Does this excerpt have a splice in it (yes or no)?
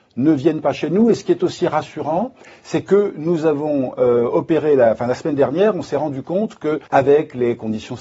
yes